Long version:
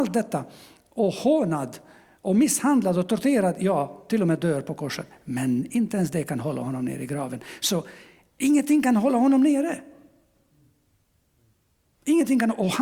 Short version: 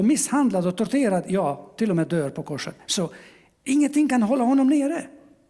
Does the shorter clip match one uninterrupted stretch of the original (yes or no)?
no